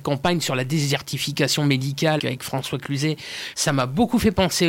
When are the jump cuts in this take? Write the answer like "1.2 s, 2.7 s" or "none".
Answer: 2.2 s, 3.5 s